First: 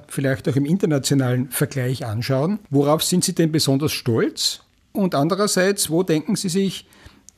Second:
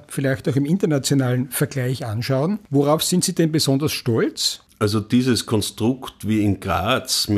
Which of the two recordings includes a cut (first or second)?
second